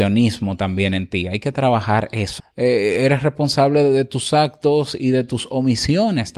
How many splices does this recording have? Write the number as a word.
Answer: one